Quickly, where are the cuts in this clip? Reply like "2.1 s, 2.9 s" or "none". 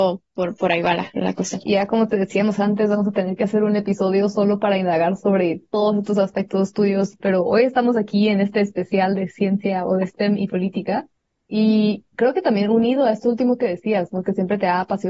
1.6 s, 7.2 s